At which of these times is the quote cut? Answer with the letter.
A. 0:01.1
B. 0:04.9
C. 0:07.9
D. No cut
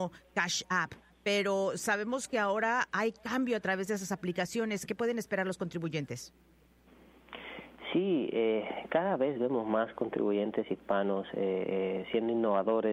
B